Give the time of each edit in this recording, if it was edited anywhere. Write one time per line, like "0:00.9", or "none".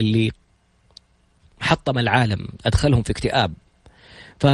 none